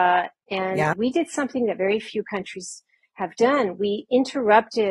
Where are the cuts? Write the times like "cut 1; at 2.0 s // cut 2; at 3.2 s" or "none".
cut 1; at 0.9 s